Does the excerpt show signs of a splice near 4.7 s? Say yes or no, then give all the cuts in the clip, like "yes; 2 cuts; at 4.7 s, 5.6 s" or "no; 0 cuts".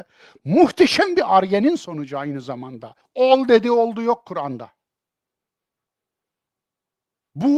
no; 1 cut; at 3.0 s